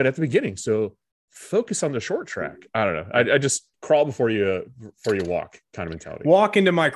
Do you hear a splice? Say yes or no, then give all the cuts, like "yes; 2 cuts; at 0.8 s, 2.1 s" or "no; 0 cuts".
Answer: yes; 1 cut; at 3.7 s